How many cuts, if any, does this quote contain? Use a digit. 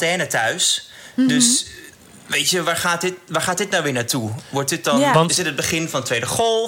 0